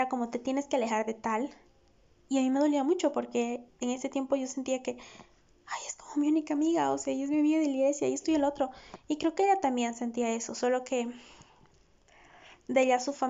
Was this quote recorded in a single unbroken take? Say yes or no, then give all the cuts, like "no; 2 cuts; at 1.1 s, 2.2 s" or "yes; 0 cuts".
yes; 0 cuts